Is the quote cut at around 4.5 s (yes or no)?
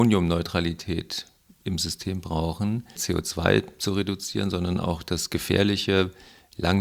no